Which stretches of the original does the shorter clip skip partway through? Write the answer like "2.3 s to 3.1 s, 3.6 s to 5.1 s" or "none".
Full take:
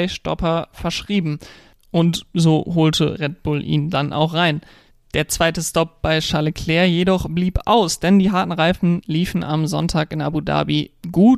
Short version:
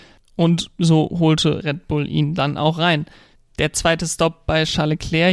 none